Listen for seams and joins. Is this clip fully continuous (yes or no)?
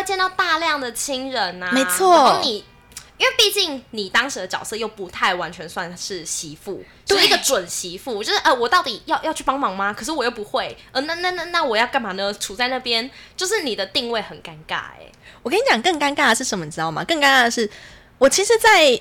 yes